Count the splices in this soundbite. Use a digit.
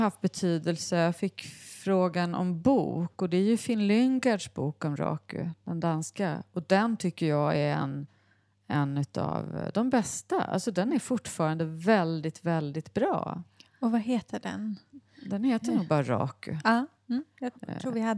0